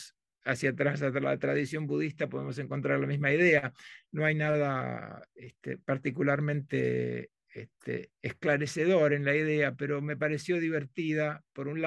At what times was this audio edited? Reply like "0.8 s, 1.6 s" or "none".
none